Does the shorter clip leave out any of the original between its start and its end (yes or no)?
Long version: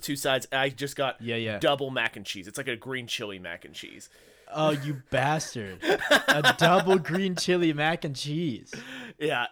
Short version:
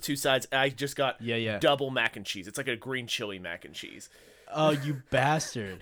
no